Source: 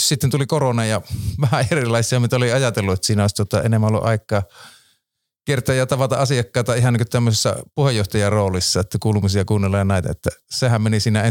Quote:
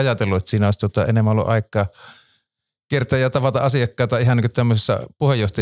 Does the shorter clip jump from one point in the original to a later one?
no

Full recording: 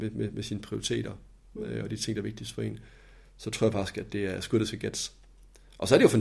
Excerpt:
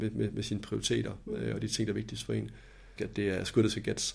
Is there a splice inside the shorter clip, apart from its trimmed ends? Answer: yes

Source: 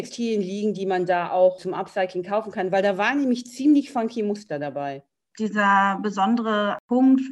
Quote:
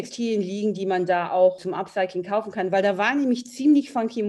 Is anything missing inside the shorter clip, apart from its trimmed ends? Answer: no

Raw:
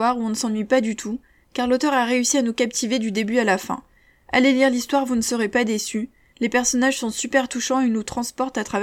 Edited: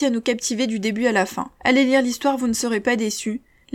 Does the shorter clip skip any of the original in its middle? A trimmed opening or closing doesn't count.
yes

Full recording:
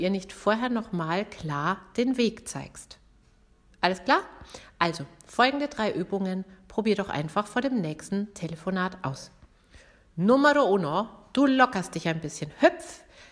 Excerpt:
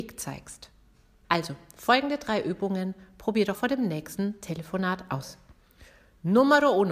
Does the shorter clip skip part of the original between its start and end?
yes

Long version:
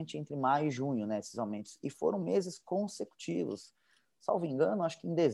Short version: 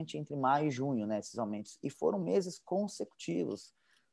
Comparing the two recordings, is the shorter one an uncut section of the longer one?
yes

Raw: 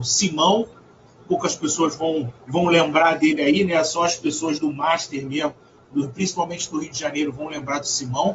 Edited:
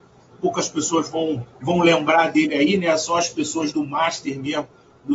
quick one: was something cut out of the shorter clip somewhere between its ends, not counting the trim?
no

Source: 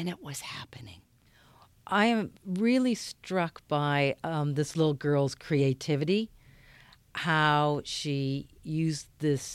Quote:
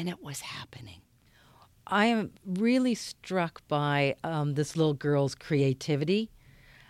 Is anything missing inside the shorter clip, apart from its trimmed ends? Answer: no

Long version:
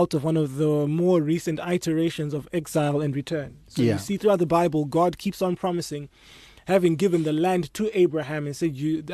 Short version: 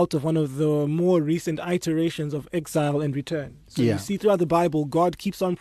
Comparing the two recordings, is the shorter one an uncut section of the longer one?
yes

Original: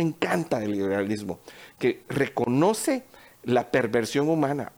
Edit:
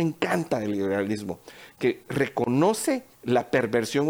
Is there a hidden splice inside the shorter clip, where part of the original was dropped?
yes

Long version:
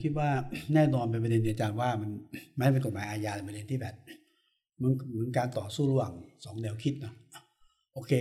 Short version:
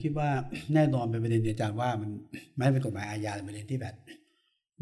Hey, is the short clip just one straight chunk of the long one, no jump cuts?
yes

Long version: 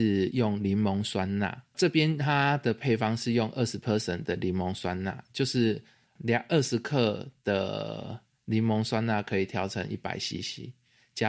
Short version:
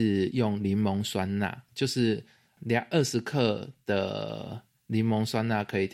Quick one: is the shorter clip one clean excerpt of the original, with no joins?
no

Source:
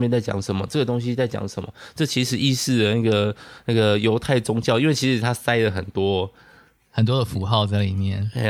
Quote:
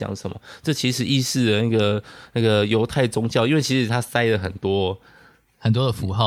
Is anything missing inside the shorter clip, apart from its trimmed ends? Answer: no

